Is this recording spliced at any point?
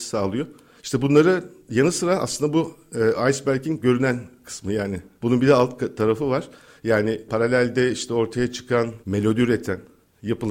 yes; 1 cut; at 9.0 s

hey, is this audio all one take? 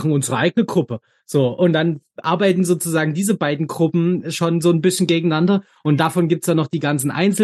yes; 0 cuts

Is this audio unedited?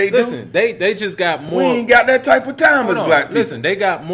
yes; 0 cuts

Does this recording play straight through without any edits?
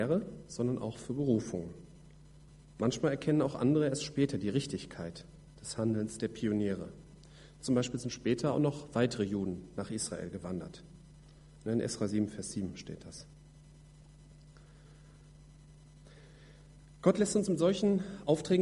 yes; 0 cuts

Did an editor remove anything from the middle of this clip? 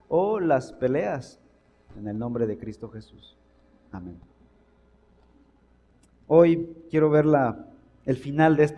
yes; 1 cut; at 1.9 s

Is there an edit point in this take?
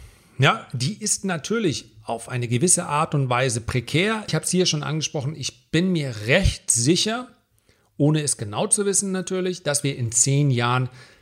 yes; 1 cut; at 4.3 s

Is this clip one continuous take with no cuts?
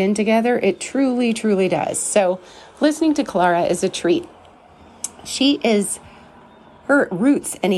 yes; 0 cuts

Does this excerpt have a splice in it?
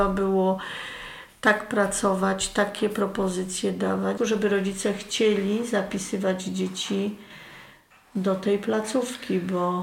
yes; 1 cut; at 4.2 s

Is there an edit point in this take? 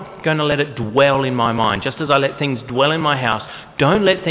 no; 0 cuts

